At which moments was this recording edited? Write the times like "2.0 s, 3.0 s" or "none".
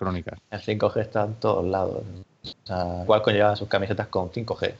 3.1 s